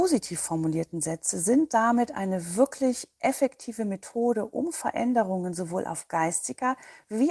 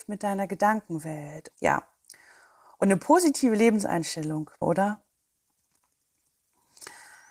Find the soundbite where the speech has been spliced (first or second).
second